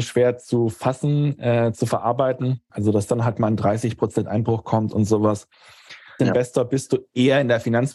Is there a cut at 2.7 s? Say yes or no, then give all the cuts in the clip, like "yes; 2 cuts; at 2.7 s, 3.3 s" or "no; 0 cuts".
yes; 2 cuts; at 2.7 s, 6.2 s